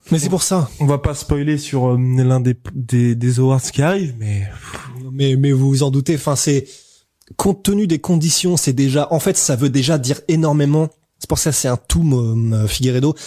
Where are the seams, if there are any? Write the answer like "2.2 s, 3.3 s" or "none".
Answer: none